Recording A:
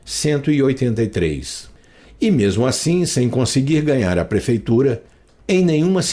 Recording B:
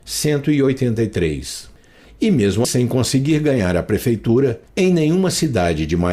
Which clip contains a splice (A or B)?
B